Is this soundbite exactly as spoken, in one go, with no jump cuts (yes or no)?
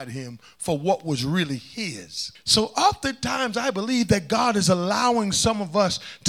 no